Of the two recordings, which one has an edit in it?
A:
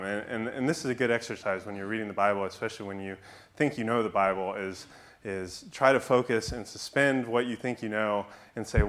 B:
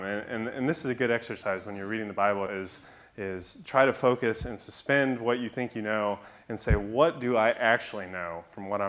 B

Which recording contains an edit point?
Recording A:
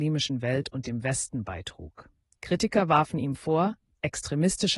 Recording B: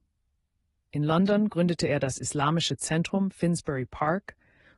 A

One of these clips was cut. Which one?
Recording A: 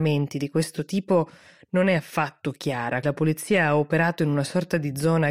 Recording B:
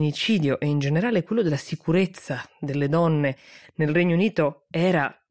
A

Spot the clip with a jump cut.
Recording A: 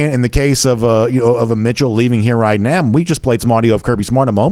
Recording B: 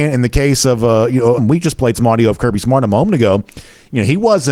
B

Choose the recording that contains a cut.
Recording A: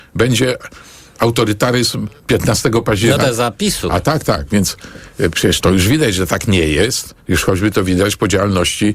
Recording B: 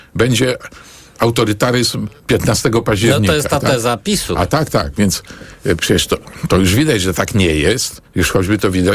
A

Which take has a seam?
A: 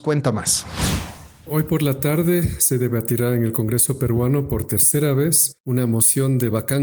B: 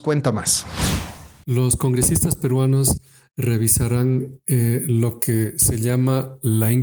B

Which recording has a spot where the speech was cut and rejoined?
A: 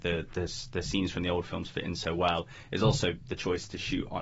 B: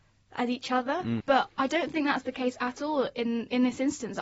B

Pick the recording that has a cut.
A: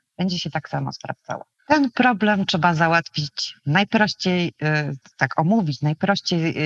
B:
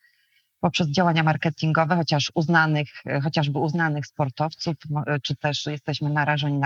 A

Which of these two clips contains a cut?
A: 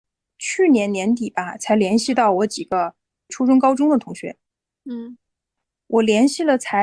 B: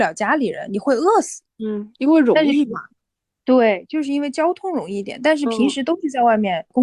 B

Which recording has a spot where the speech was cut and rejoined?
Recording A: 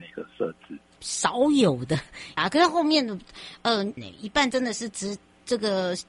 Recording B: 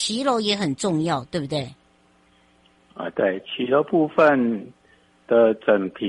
A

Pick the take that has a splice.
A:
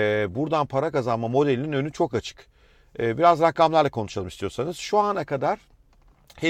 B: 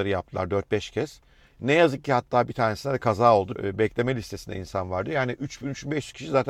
B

